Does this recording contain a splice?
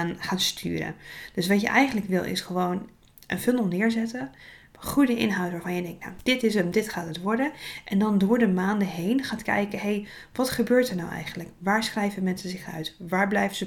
no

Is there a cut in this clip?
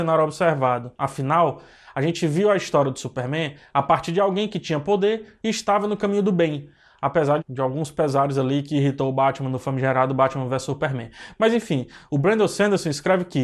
yes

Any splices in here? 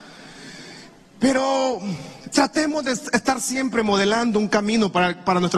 no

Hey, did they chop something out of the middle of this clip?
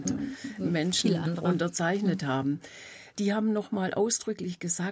no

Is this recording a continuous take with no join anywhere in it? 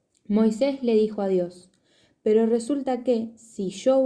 yes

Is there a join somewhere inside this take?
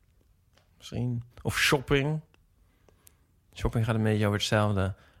yes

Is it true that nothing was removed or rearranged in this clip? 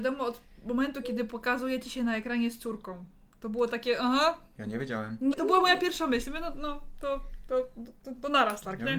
no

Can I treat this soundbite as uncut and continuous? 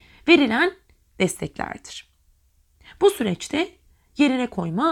yes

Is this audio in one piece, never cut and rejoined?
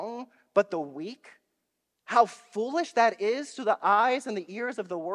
no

